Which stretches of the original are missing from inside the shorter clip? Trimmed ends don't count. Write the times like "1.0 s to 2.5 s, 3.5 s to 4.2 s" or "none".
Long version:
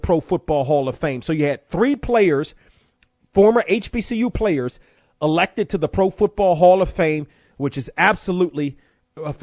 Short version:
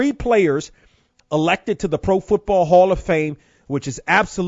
3.0 s to 5.1 s